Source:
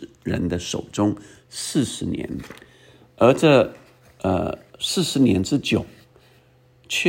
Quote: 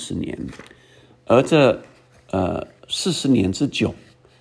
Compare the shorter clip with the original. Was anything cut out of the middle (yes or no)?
no